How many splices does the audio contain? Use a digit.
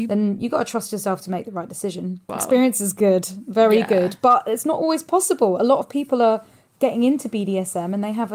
1